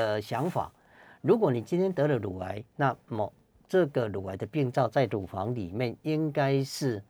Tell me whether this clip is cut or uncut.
uncut